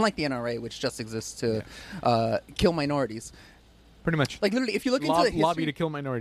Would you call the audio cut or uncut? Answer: uncut